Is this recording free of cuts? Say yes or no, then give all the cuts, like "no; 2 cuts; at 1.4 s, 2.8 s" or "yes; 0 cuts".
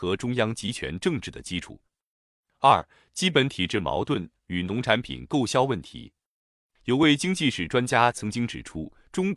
yes; 0 cuts